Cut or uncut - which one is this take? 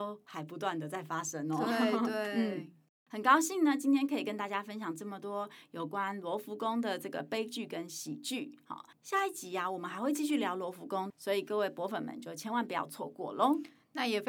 cut